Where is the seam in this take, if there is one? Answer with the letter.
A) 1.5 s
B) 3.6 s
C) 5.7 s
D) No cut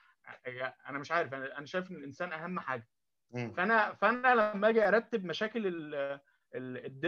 D